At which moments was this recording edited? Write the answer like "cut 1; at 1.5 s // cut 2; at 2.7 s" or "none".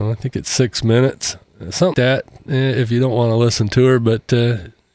cut 1; at 1.9 s